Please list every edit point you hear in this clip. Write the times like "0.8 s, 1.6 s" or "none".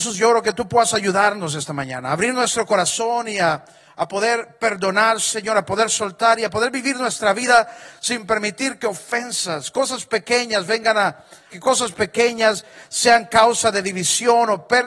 11.5 s